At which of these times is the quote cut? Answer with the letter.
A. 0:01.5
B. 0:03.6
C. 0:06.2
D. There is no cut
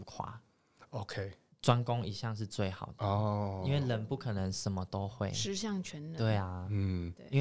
A